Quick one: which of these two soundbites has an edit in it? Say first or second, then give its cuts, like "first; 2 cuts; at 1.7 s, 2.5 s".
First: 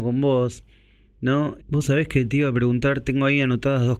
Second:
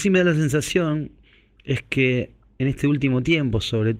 first; 1 cut; at 1.6 s